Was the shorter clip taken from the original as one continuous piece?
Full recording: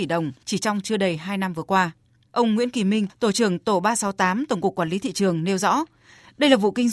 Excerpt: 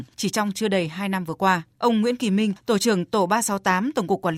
no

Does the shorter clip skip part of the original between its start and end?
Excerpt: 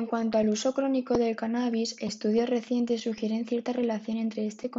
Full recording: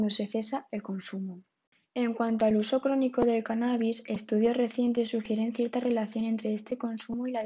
no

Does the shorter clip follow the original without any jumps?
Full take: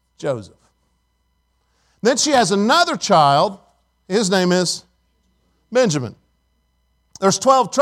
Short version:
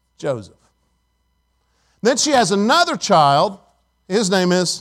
yes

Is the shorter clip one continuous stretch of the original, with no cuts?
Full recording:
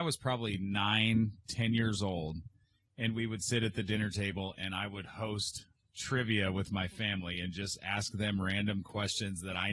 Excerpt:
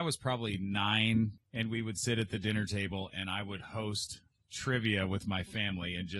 no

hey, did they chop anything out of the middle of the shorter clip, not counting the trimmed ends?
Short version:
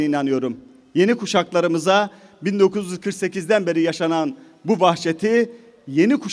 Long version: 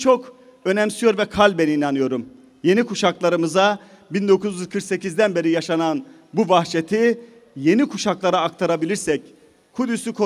no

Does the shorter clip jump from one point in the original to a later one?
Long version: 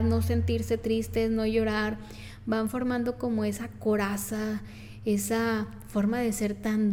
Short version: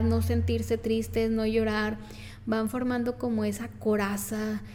no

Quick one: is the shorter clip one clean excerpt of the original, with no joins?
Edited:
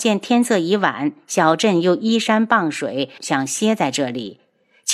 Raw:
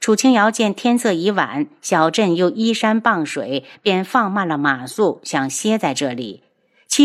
no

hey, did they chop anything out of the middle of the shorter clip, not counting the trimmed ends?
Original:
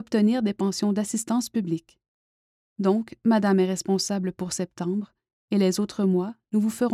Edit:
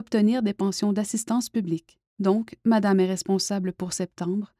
yes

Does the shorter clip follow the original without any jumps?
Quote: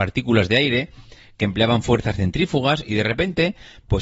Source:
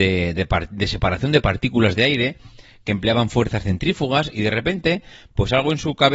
yes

